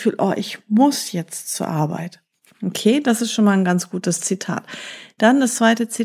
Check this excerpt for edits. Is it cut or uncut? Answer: uncut